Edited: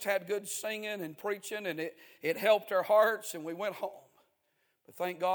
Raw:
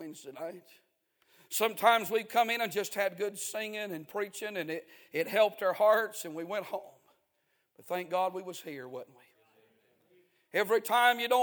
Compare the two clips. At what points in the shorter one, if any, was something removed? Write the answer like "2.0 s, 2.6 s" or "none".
none